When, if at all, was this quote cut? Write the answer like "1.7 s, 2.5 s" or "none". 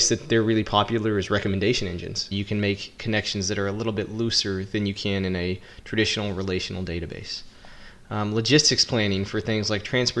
2.3 s